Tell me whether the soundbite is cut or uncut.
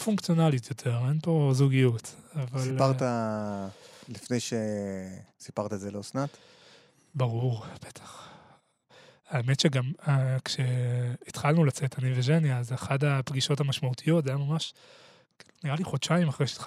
cut